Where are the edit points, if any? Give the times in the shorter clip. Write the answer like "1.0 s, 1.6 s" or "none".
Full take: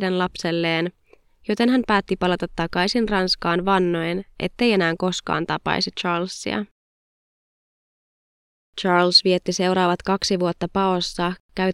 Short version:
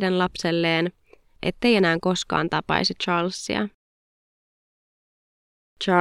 1.4 s